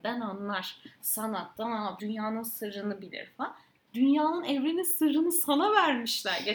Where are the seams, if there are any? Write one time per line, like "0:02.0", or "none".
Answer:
0:02.0
0:03.9

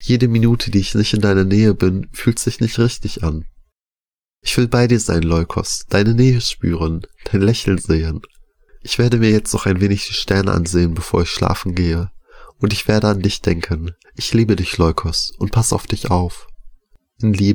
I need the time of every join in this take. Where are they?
0:14.0

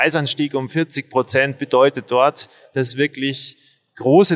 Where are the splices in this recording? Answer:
none

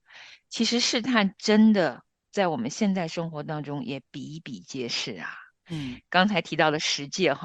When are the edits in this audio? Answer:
none

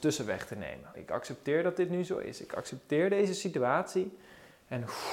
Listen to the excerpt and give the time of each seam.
0:00.9

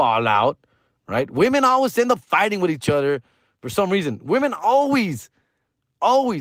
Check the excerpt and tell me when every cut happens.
none

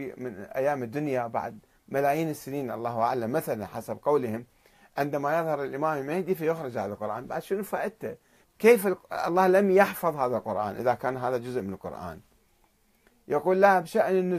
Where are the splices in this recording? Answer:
0:08.4

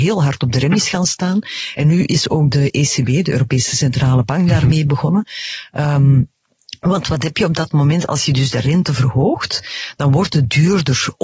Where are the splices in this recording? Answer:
none

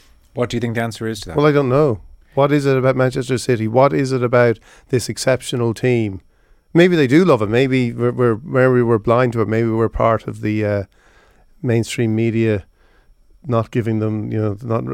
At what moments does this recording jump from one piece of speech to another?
none

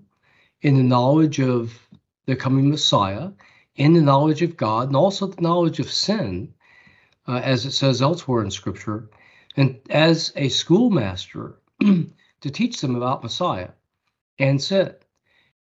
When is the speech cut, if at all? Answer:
none

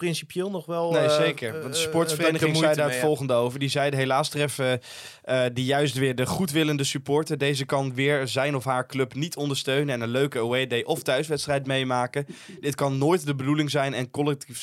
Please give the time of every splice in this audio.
none

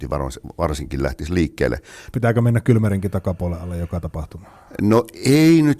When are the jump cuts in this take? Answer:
0:02.1

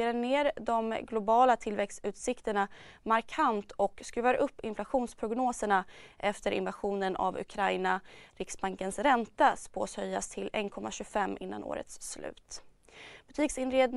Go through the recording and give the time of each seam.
0:08.3

